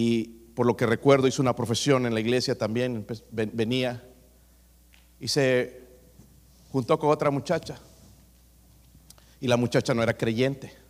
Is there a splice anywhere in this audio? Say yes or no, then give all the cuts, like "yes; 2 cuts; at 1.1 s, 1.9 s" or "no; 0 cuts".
no; 0 cuts